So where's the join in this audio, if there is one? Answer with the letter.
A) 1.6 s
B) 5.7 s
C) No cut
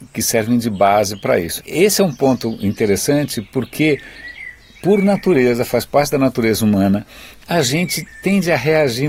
A